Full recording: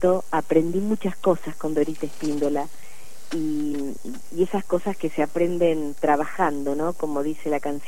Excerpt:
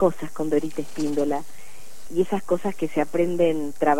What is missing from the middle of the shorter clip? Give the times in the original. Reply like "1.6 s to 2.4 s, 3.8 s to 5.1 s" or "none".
3.3 s to 4.2 s